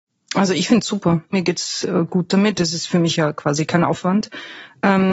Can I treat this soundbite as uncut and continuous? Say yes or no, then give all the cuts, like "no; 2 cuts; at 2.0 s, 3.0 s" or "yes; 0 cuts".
no; 1 cut; at 1.3 s